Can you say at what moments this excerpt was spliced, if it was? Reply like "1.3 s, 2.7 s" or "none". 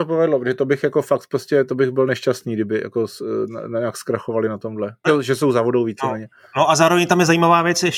5.0 s